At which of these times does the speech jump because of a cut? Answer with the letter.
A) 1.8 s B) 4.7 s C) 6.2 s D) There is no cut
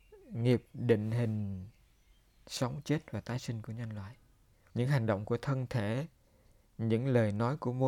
B